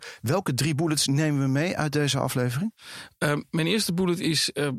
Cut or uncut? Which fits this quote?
uncut